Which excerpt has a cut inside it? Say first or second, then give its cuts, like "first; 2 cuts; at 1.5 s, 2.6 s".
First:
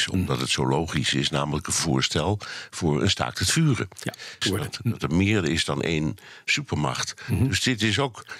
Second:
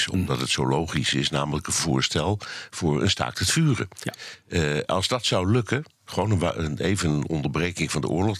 first; 1 cut; at 4.4 s